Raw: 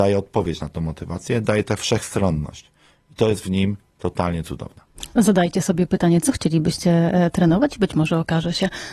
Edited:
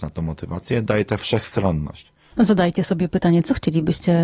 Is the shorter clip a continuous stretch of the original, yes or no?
no